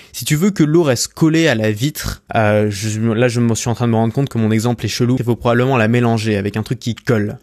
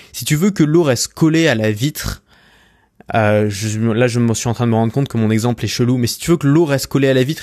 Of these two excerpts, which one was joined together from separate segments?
first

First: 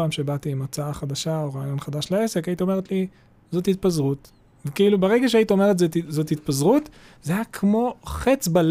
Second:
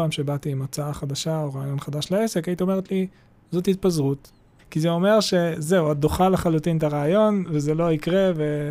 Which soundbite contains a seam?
second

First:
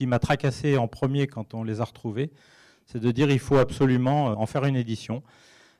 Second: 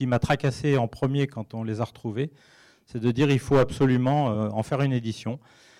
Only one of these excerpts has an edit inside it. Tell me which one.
first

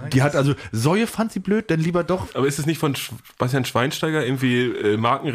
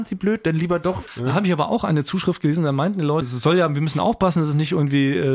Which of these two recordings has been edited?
second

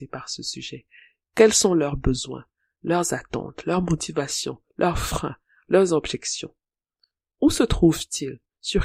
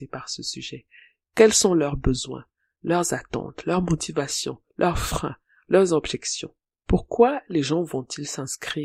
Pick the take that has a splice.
second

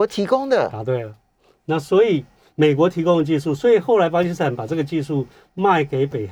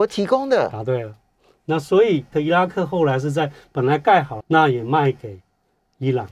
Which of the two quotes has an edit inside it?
second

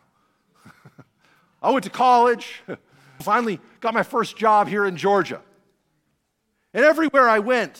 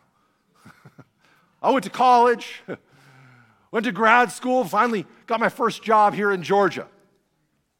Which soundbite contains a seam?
first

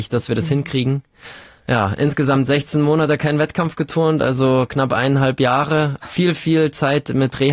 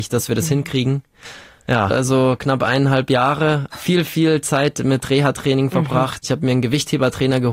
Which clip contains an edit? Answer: second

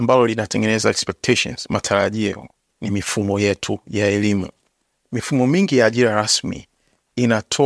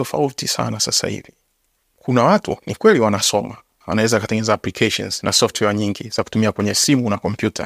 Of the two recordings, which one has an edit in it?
second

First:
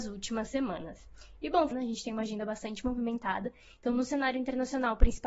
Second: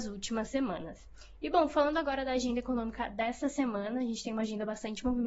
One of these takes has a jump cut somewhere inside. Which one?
first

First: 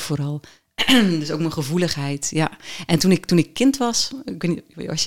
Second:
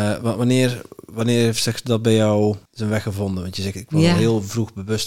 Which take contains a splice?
second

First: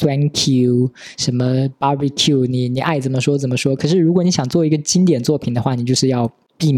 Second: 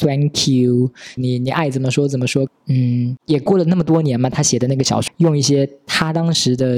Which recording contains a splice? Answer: second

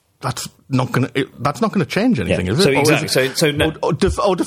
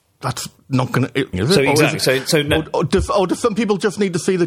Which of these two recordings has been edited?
second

